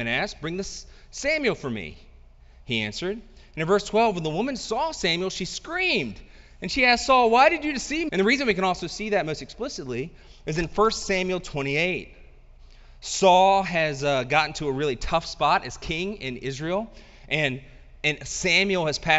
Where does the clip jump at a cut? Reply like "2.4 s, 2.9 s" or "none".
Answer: 8.1 s